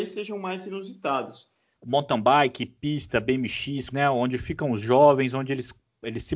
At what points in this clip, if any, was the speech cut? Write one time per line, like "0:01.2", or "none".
0:01.8
0:03.9